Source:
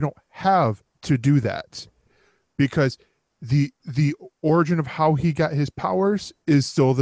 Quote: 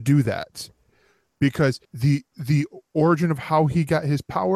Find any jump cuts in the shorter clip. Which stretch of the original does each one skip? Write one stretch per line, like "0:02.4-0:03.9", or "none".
0:03.0-0:03.3